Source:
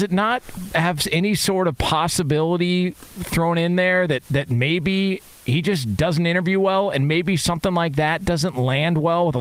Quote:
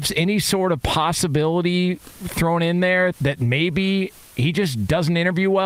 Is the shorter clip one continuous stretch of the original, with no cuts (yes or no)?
no